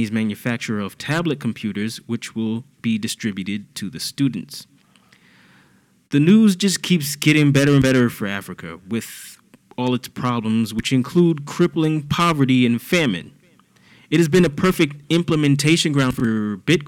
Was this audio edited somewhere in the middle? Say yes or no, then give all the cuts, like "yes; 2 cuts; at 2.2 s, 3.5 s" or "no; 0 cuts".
no; 0 cuts